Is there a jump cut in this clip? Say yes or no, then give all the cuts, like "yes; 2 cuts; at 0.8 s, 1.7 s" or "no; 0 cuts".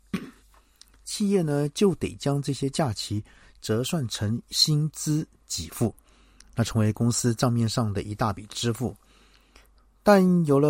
no; 0 cuts